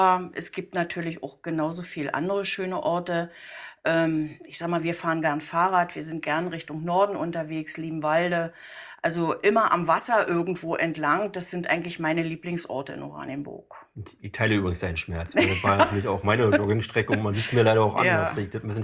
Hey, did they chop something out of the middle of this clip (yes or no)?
no